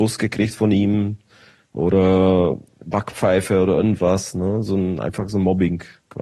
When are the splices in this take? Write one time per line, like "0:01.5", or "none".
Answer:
none